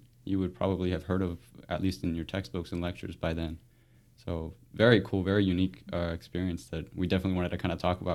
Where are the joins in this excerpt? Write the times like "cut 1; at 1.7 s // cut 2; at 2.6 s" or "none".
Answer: none